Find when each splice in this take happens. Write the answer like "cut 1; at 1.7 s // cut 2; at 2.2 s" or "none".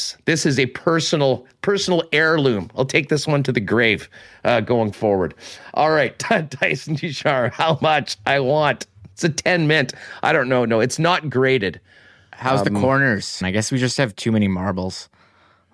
cut 1; at 13.4 s